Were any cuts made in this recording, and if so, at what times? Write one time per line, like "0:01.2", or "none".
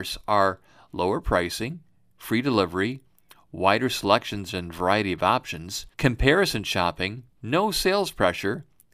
0:05.9
0:07.3